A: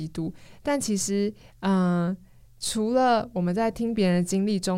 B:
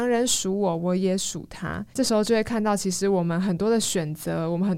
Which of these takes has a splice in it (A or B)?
B